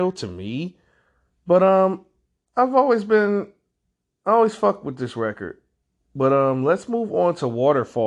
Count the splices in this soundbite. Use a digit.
0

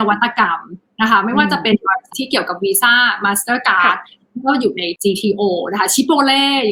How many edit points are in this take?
1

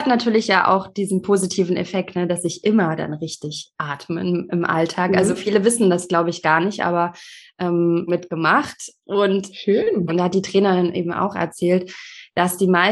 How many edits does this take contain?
2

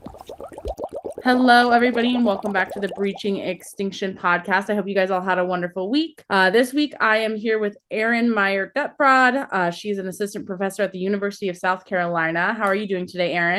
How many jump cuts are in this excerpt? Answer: 1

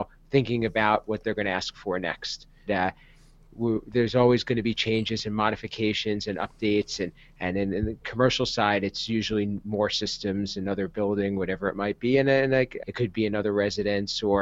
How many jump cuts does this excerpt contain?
2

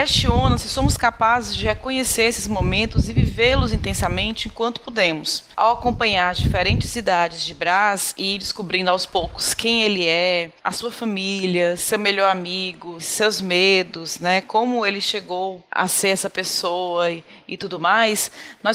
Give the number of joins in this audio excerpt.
1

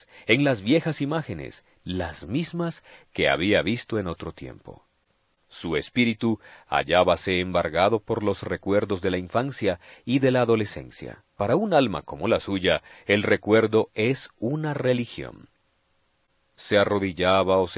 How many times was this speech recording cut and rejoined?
2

